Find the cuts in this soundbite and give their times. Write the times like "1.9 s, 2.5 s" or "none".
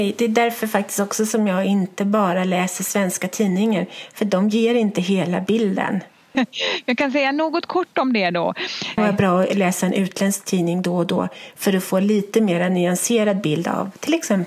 6.3 s, 9.0 s